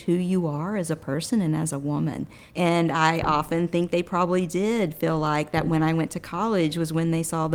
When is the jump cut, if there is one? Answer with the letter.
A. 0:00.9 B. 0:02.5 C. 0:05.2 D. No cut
B